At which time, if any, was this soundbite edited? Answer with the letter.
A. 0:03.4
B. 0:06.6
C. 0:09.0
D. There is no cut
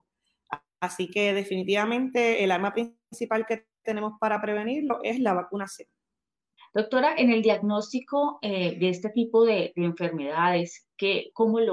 B